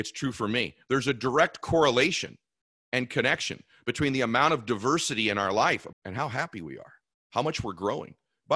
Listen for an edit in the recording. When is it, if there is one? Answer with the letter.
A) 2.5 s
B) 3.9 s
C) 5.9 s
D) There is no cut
C